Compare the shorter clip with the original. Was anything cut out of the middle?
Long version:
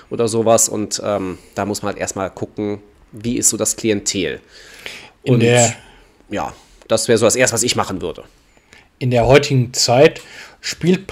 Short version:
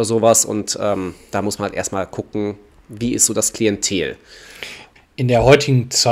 yes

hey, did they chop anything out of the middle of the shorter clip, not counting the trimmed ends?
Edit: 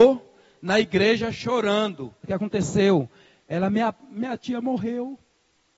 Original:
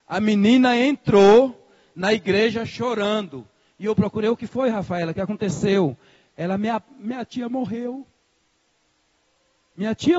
yes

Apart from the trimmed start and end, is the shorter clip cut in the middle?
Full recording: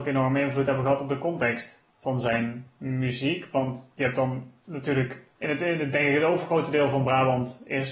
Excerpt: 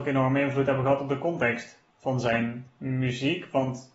no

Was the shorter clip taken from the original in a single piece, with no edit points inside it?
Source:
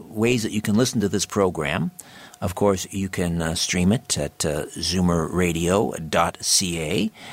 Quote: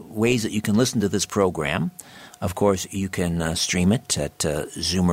yes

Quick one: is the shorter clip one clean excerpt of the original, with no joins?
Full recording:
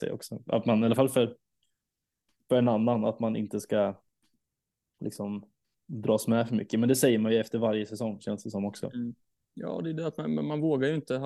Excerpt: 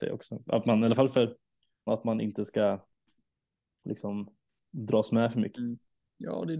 no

